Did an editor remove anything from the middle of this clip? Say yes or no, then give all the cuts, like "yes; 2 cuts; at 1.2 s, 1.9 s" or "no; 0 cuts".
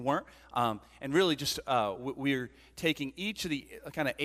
no; 0 cuts